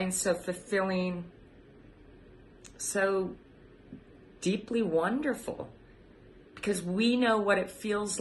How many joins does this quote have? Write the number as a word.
zero